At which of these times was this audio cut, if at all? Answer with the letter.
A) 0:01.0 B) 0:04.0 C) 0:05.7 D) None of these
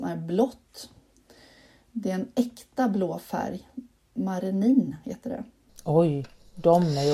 C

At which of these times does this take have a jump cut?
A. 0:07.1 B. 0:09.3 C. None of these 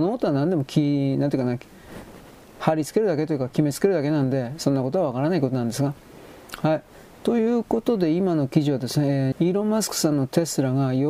B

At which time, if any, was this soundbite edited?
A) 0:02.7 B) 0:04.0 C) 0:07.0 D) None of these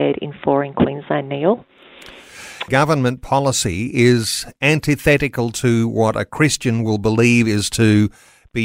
A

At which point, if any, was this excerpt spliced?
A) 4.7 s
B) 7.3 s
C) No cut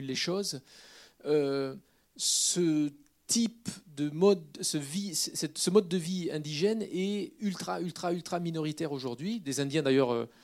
C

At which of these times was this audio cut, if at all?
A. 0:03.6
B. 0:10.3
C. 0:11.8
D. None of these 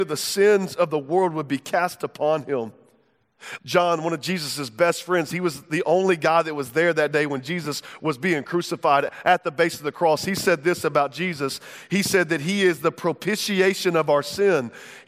A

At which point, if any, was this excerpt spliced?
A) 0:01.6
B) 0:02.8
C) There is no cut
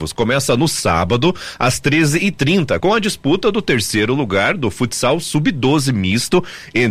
B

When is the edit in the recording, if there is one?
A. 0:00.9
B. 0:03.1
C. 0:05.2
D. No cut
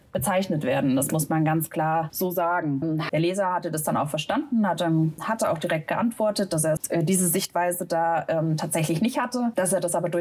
B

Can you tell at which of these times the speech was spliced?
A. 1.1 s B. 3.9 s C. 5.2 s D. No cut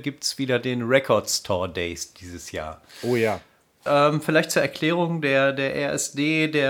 B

